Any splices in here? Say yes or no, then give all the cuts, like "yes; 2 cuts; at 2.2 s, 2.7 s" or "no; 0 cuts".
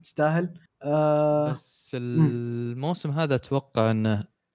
no; 0 cuts